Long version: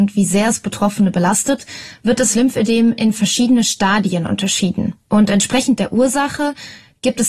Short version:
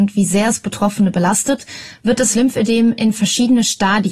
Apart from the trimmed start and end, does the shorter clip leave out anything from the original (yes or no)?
no